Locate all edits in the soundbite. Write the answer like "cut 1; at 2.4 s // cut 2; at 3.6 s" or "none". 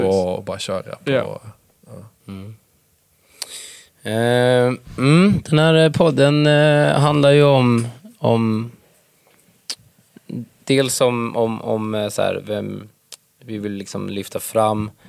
cut 1; at 2.2 s